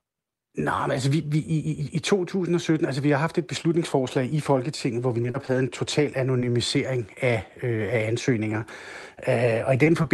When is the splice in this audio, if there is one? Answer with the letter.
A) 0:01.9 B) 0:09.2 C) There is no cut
C